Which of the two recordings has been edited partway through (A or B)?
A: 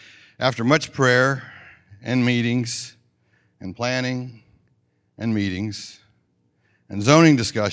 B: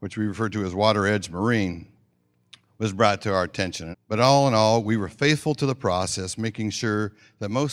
B